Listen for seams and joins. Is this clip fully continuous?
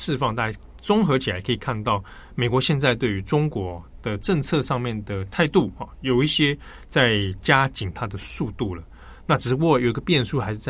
yes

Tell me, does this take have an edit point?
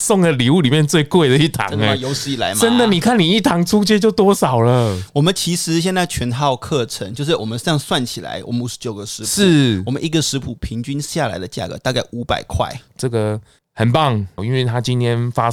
yes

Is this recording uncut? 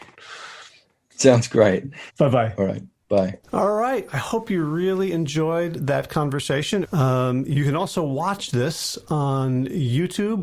no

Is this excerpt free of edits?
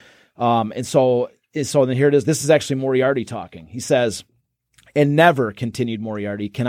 yes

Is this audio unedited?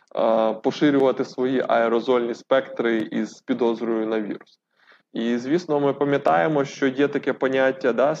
no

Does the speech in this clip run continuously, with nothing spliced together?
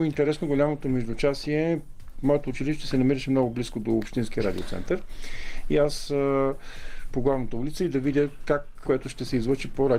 no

